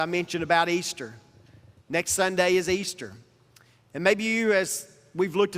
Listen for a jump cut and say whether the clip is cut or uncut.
uncut